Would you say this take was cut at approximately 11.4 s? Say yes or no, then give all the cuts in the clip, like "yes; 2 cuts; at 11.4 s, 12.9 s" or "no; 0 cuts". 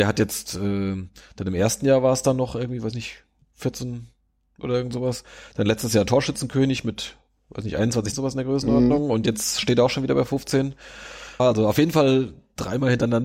yes; 2 cuts; at 8.1 s, 11.4 s